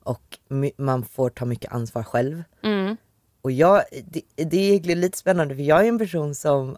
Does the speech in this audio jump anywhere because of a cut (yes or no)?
no